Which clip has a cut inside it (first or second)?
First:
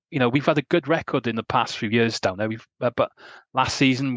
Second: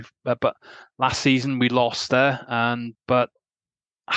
second